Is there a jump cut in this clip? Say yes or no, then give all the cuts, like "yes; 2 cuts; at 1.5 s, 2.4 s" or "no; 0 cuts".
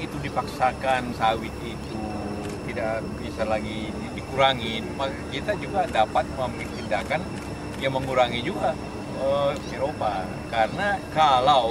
yes; 1 cut; at 9.7 s